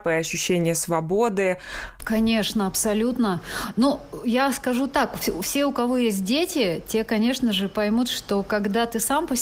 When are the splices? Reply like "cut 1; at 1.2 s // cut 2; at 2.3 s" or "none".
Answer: cut 1; at 2.0 s